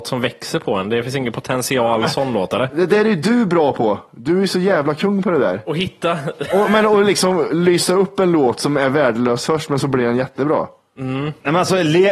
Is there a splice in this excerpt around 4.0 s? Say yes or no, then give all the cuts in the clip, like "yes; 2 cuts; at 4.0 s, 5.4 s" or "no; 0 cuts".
no; 0 cuts